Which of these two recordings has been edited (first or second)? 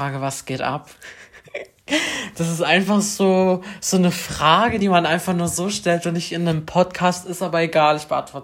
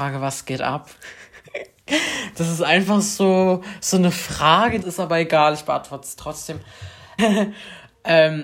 second